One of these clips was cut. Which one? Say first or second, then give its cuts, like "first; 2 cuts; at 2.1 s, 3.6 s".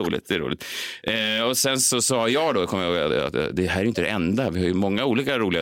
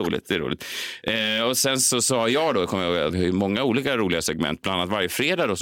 second; 1 cut; at 3.1 s